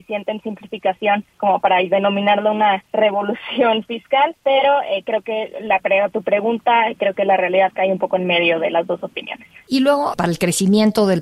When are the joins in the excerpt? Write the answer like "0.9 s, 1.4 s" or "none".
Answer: 10.1 s